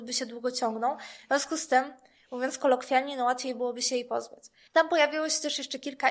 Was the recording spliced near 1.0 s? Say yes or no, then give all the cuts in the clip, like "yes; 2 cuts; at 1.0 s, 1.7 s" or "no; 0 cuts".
no; 1 cut; at 4.7 s